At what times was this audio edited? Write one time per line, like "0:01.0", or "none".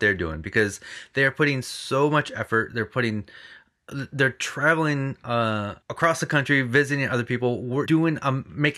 0:05.8
0:07.9